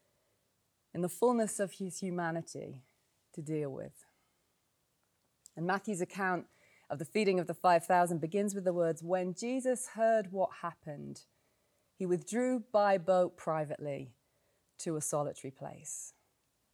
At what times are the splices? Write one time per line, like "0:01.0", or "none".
none